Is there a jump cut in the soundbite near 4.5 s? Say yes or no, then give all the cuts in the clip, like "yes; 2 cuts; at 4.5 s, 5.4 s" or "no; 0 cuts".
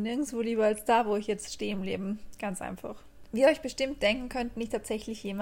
no; 1 cut; at 3.3 s